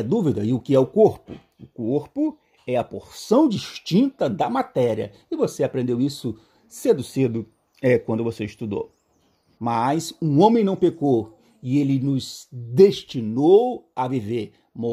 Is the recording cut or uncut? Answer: cut